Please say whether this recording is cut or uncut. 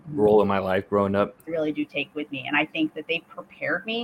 cut